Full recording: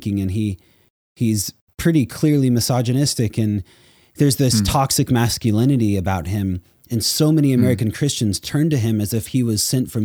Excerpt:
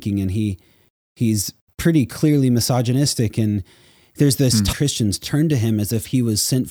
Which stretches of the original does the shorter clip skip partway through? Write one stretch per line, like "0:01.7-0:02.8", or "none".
0:04.7-0:07.9